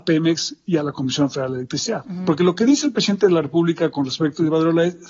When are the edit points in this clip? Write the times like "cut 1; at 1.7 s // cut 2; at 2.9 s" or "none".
cut 1; at 2.0 s